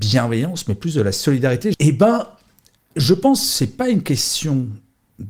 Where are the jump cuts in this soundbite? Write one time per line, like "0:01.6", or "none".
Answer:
0:01.7